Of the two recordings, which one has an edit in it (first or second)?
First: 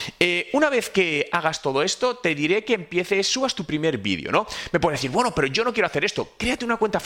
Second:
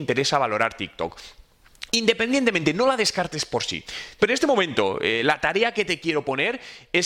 second